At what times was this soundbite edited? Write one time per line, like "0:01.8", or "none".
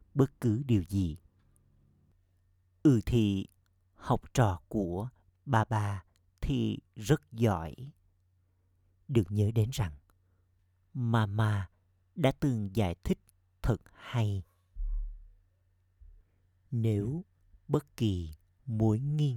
none